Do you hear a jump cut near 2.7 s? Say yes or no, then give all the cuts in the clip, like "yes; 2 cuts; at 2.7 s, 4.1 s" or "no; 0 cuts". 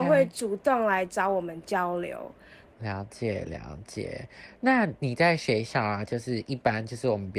yes; 1 cut; at 2.7 s